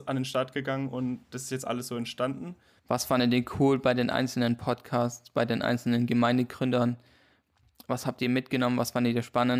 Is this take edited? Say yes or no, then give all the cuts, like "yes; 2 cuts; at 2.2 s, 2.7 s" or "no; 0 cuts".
yes; 1 cut; at 2.8 s